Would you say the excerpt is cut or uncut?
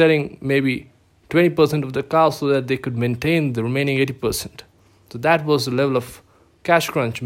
uncut